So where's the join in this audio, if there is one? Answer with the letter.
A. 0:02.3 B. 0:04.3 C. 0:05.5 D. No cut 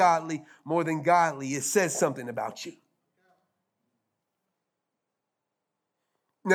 D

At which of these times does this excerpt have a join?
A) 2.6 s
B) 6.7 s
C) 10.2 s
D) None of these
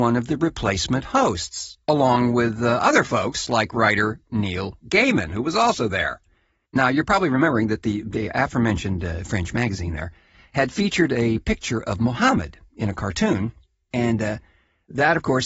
D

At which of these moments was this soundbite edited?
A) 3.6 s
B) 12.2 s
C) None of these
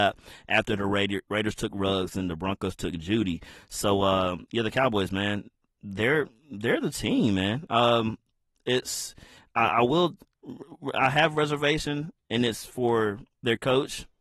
C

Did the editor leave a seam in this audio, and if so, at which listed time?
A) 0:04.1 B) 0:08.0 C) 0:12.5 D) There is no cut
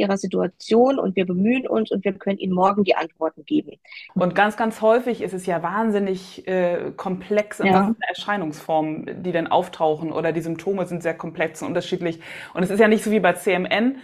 A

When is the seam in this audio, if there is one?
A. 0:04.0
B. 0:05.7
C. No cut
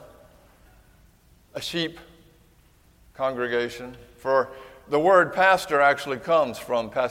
C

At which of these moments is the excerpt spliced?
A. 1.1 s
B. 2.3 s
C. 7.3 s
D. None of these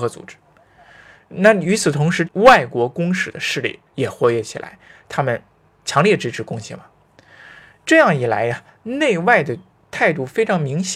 B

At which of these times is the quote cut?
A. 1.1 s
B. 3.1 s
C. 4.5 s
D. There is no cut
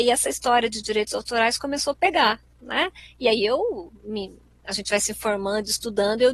D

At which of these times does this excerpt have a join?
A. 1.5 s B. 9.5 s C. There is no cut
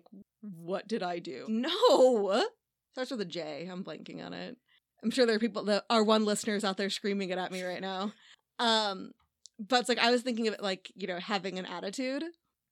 A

